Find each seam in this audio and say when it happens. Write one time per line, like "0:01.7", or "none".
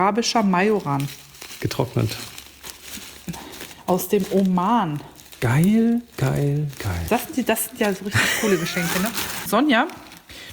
0:07.1
0:09.5